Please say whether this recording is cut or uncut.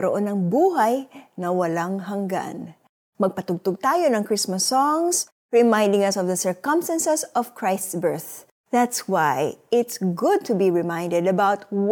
cut